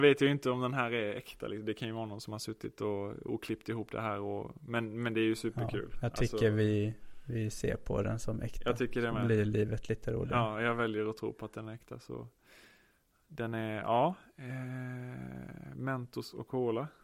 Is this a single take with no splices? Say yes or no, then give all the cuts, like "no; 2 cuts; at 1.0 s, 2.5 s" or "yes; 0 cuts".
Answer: yes; 0 cuts